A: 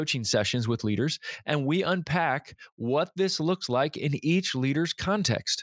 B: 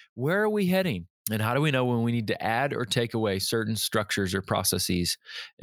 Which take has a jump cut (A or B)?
B